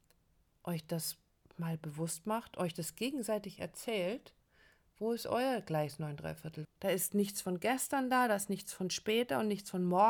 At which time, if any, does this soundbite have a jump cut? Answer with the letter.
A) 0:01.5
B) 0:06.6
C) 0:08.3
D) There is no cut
B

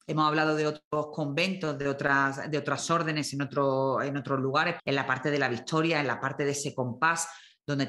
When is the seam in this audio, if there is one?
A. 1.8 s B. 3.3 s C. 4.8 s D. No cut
C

